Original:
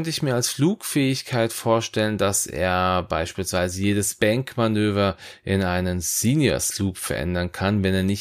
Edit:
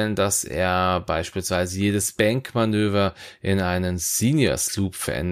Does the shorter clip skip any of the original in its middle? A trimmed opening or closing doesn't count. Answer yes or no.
no